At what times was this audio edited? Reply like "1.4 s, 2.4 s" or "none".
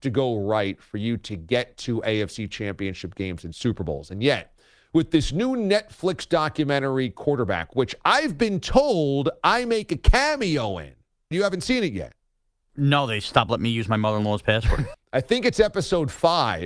11.3 s, 14.9 s